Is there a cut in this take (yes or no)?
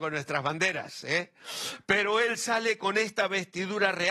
no